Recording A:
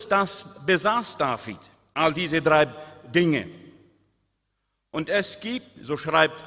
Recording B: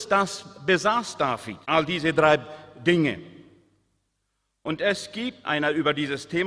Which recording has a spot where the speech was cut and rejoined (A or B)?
B